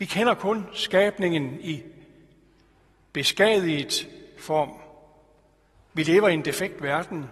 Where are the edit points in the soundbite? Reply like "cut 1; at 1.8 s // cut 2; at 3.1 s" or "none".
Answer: cut 1; at 5.7 s